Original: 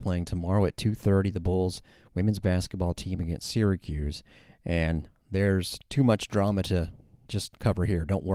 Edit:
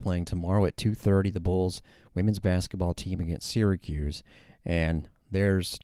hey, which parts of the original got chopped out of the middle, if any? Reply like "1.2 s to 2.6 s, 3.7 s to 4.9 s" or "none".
none